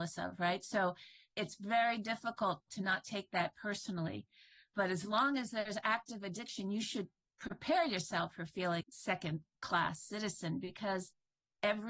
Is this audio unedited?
no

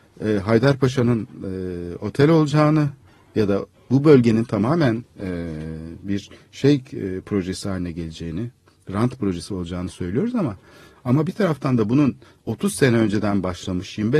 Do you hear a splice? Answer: no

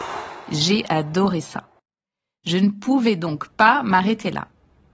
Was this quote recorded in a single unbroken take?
yes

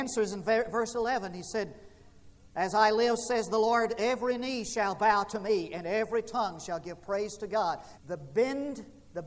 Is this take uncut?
no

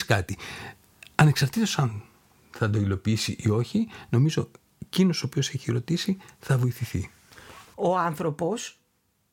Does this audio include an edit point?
yes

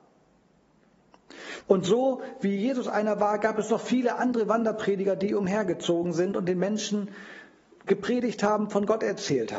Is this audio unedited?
no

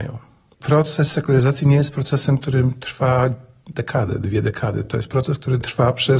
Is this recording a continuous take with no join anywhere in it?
yes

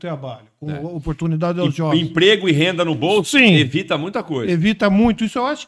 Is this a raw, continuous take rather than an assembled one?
yes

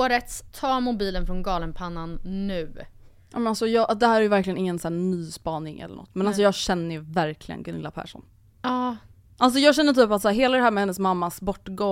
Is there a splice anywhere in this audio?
no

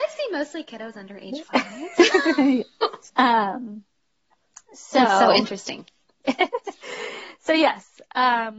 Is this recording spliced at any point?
yes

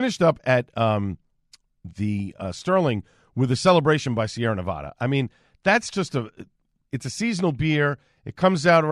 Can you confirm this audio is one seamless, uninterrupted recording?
yes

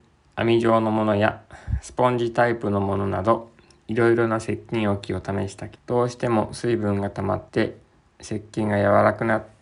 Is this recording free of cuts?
no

